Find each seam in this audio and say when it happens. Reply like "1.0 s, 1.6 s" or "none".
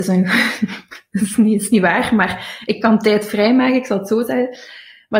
none